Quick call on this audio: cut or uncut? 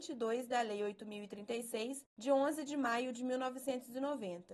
uncut